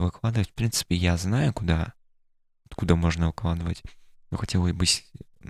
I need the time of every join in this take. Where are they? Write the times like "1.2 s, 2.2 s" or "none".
none